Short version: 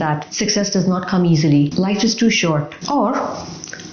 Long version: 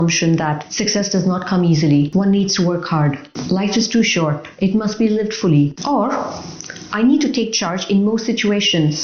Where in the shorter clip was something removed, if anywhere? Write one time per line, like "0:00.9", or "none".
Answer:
0:01.7
0:02.8